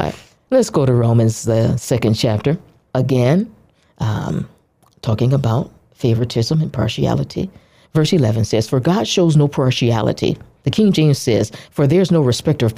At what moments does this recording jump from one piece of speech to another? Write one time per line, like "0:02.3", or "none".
none

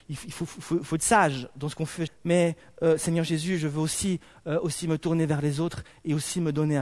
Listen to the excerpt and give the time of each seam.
0:02.1

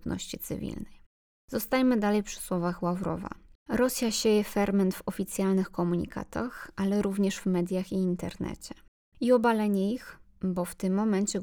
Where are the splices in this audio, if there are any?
0:03.7
0:09.1

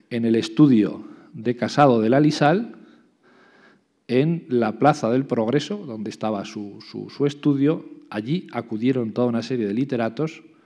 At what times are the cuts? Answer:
none

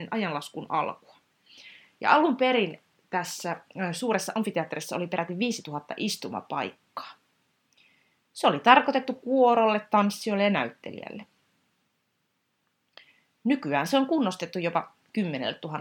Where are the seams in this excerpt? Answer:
none

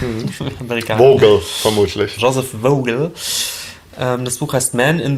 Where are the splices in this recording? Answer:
0:02.2

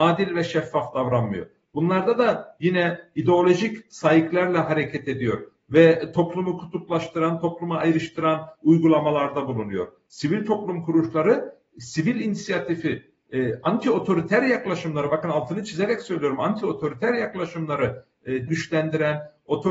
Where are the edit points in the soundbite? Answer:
0:10.1
0:18.5

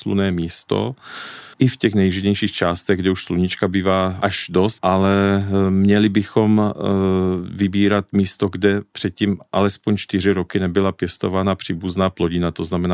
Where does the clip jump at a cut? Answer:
0:01.5
0:04.8

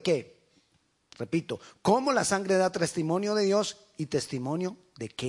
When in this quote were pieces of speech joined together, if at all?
none

